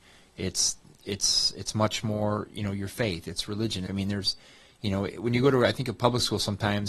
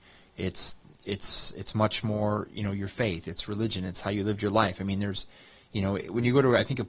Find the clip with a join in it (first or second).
first